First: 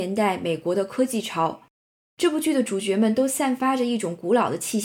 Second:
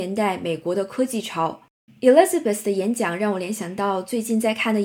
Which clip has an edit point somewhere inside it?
second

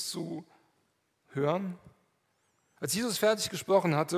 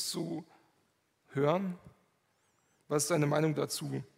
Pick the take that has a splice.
first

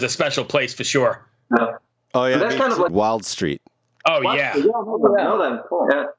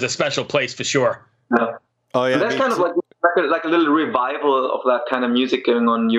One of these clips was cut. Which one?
first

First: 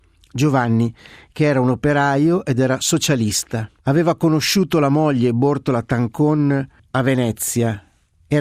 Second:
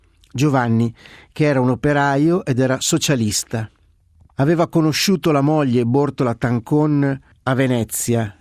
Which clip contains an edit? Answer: first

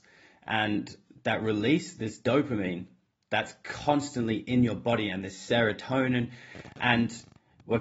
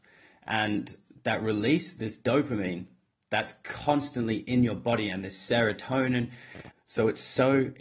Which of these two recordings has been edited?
second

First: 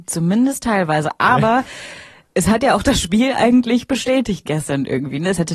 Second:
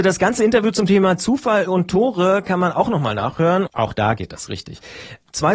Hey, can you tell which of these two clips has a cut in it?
second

